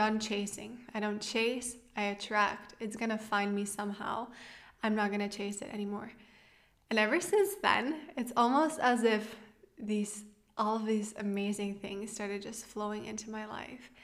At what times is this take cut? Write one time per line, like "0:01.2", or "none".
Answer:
none